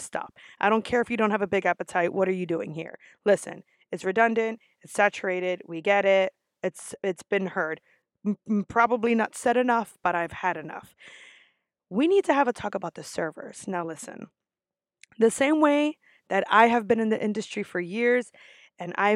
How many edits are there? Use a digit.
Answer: 0